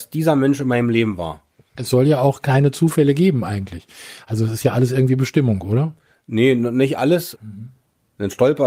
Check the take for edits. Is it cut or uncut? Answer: cut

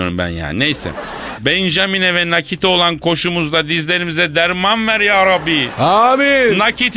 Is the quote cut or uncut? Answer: cut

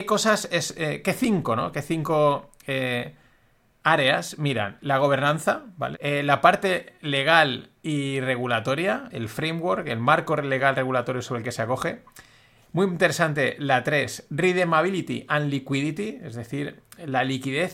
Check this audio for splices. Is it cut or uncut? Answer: cut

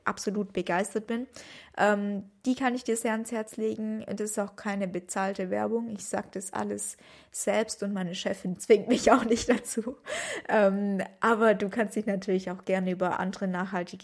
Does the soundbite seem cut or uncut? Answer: uncut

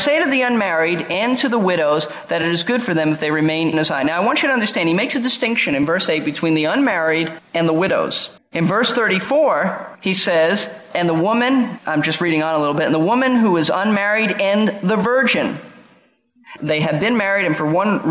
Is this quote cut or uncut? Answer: cut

